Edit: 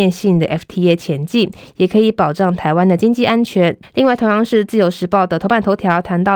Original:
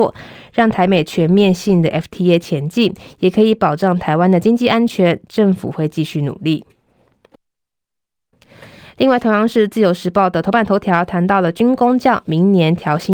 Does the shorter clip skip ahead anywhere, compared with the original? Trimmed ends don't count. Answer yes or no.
yes